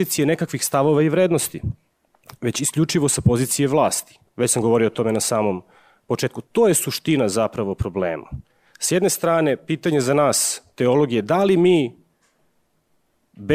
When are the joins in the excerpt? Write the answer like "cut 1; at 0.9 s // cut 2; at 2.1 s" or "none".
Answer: cut 1; at 4.3 s